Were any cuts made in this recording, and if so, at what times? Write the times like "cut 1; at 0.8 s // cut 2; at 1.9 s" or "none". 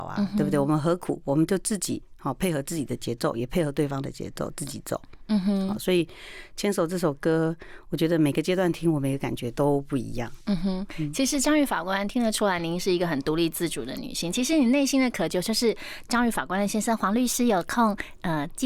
none